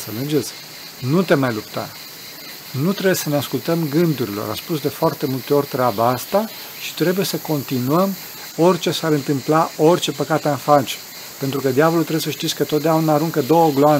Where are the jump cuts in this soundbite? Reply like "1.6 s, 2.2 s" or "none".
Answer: none